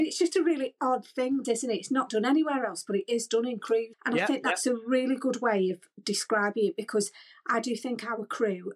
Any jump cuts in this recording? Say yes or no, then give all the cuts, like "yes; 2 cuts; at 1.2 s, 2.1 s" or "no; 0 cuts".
yes; 2 cuts; at 1.4 s, 3.9 s